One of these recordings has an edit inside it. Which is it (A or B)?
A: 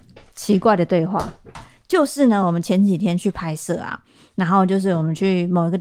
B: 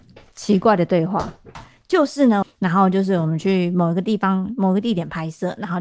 B